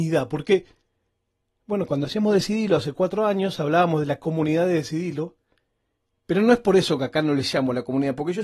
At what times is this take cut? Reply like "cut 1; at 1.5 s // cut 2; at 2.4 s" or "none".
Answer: none